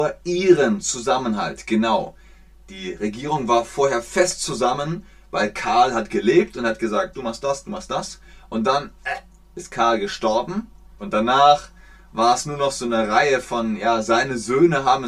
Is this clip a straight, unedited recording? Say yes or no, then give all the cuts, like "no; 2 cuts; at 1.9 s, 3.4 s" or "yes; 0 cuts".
no; 2 cuts; at 7.1 s, 11.0 s